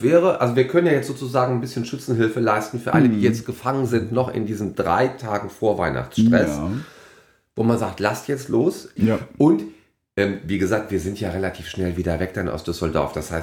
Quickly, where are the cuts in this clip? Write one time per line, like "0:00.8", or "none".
0:09.0